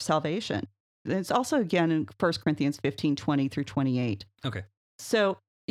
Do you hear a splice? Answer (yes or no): yes